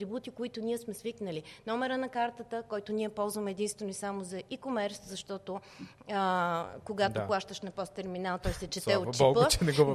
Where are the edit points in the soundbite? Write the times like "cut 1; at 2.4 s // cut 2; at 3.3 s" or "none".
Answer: none